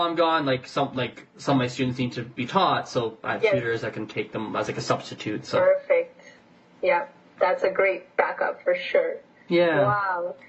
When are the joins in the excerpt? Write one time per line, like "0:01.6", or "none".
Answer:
0:02.4